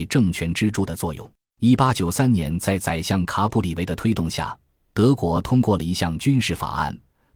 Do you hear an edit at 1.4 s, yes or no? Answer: yes